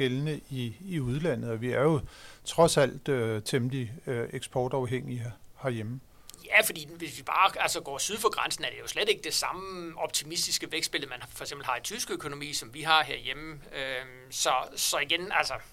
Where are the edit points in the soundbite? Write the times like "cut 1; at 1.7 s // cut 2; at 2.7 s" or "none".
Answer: none